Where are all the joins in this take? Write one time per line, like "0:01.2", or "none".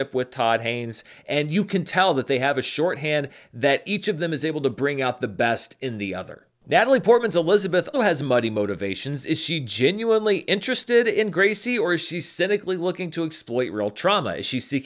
0:07.9